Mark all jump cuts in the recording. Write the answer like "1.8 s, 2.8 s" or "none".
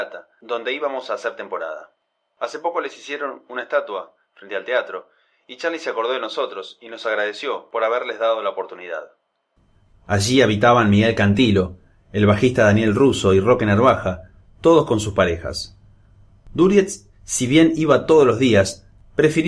9.9 s